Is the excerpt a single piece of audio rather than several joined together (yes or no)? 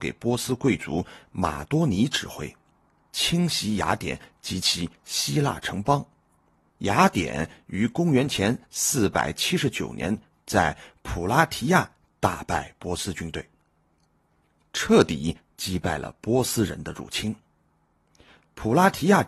no